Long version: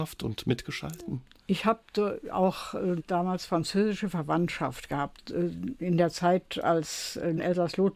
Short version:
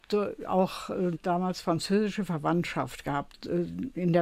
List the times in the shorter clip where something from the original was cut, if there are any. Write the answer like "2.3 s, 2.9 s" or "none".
none